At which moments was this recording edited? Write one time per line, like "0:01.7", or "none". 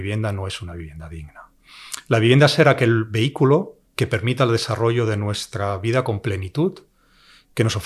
0:03.9